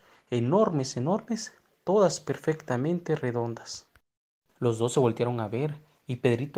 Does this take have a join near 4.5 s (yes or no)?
yes